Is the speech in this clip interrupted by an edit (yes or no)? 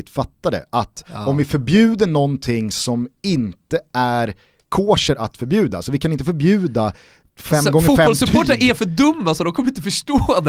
no